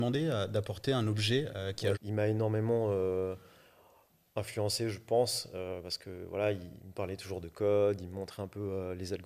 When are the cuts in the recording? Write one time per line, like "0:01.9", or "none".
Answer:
0:01.9